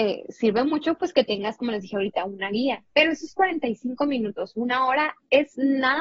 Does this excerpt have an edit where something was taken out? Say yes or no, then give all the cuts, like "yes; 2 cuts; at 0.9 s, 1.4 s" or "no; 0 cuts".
no; 0 cuts